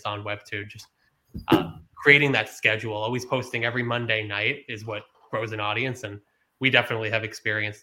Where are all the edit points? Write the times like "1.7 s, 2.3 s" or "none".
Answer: none